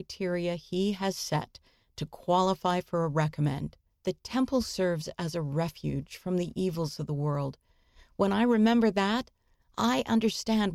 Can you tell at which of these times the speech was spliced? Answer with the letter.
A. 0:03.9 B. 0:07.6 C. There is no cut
A